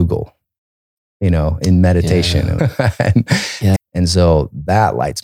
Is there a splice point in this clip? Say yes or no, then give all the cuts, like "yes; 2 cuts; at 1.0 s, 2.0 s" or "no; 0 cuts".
yes; 2 cuts; at 2.6 s, 3.8 s